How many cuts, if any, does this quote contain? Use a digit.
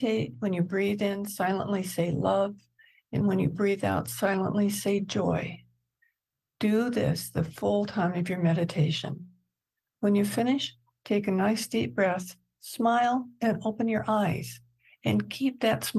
0